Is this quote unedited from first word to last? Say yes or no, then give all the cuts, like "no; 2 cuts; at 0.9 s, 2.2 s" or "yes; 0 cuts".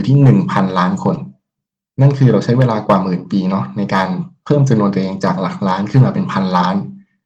yes; 0 cuts